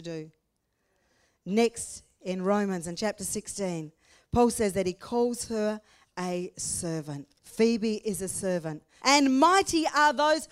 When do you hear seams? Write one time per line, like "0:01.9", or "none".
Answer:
0:07.4
0:09.0